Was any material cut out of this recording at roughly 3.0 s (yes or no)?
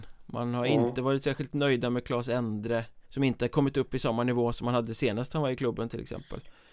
yes